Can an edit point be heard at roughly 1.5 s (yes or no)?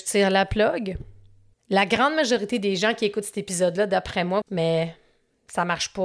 yes